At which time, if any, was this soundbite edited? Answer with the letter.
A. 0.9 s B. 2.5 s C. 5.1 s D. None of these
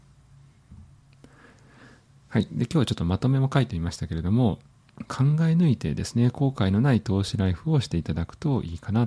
C